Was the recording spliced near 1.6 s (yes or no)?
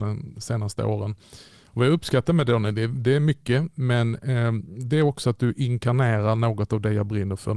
no